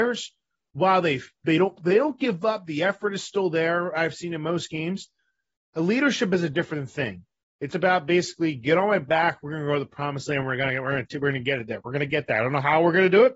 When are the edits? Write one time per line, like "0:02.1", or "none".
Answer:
0:07.7